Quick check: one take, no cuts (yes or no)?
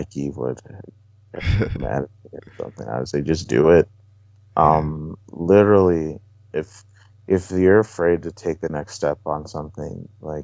yes